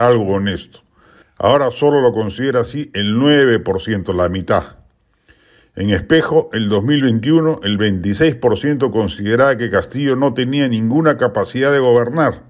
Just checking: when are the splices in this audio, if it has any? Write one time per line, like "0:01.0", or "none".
0:01.2